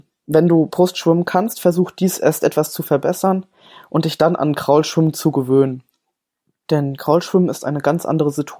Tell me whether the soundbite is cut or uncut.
uncut